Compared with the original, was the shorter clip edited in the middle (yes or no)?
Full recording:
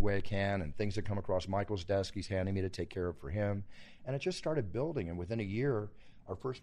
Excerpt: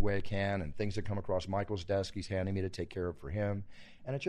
no